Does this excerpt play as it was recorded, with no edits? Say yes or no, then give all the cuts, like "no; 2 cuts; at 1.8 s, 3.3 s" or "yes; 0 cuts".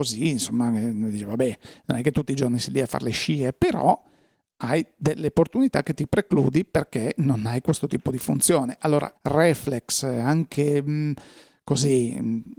no; 1 cut; at 9.2 s